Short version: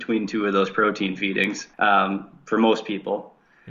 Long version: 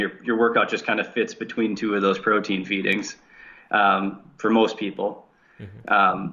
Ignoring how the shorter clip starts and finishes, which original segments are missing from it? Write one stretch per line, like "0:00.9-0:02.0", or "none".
0:03.2-0:03.7